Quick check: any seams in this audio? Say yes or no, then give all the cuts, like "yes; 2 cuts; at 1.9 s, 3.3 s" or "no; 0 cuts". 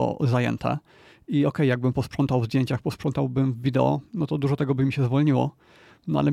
no; 0 cuts